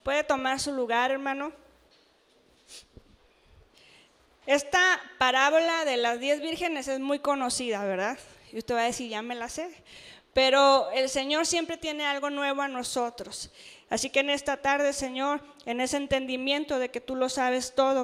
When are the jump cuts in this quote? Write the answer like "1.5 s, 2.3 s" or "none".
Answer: 13.9 s

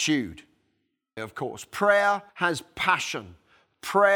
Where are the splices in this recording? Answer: 1.2 s, 2.3 s

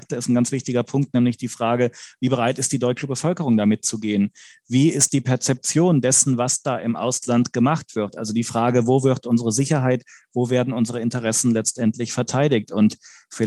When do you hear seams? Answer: none

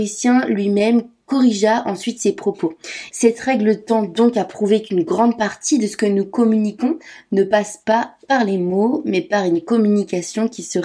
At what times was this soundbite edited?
3.1 s

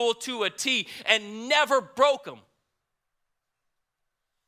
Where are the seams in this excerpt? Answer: none

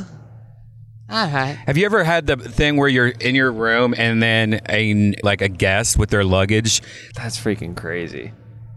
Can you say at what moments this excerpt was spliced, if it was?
5.2 s, 7.1 s

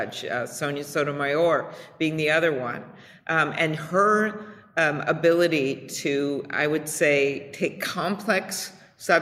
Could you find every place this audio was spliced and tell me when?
none

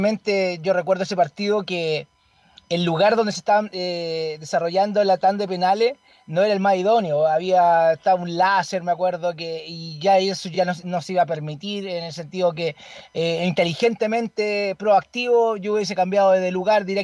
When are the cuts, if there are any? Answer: none

